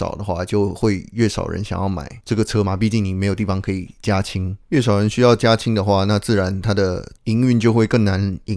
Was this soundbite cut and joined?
no; 0 cuts

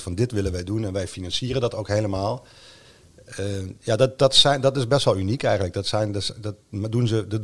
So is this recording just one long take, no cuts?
yes; 0 cuts

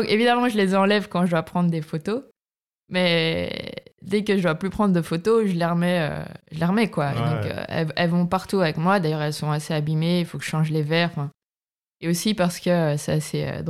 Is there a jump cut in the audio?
no; 0 cuts

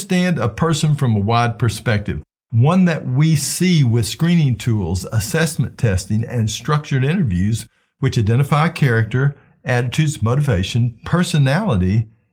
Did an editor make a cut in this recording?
no; 0 cuts

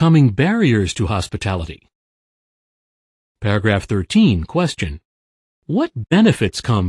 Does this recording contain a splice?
no; 0 cuts

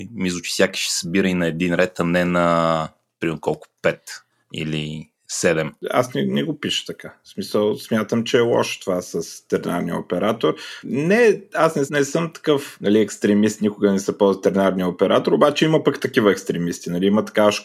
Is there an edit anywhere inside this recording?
yes; 2 cuts; at 10.8 s, 11.9 s

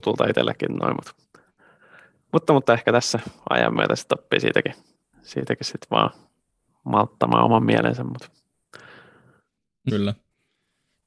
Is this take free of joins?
no; 1 cut; at 9.9 s

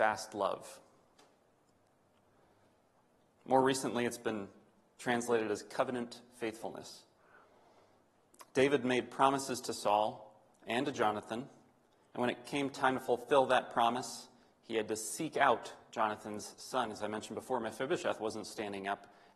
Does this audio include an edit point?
no; 0 cuts

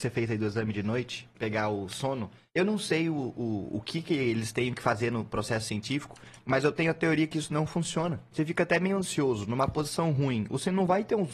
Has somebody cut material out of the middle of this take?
yes; 2 cuts; at 1.3 s, 8.3 s

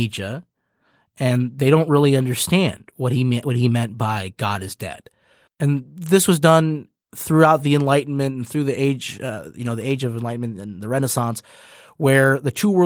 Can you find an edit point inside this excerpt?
yes; 1 cut; at 5.5 s

